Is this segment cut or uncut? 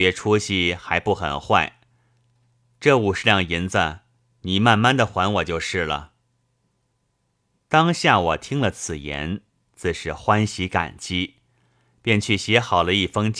uncut